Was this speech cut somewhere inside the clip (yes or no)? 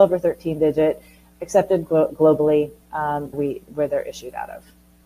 yes